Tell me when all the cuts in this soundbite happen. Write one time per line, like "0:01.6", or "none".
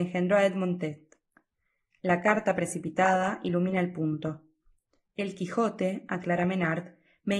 none